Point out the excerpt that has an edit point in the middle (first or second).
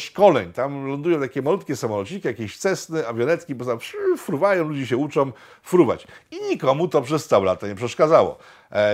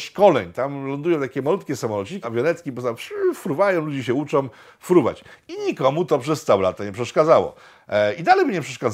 second